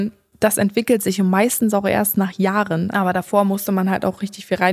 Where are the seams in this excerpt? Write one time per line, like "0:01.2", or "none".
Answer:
0:02.9